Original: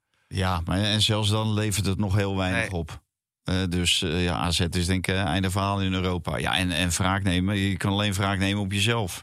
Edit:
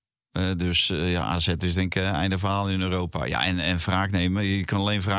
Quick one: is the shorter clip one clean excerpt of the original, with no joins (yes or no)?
yes